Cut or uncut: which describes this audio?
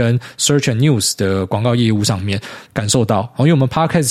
cut